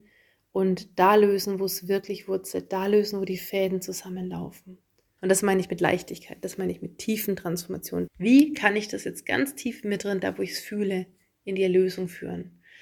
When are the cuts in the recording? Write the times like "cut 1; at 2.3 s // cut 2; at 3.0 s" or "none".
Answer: cut 1; at 5.2 s // cut 2; at 8.1 s